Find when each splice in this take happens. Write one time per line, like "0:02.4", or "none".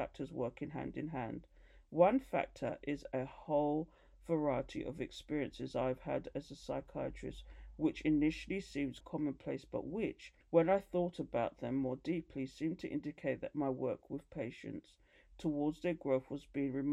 0:09.0
0:10.4